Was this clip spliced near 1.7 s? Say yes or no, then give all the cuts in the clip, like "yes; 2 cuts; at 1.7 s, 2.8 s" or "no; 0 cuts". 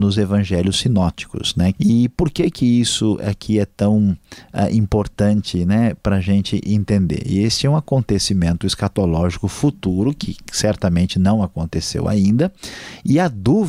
yes; 1 cut; at 1.7 s